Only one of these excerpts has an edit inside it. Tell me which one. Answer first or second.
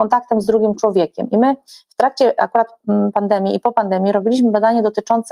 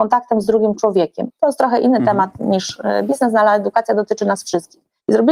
second